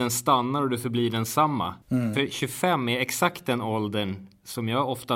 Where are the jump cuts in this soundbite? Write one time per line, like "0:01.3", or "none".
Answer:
0:01.8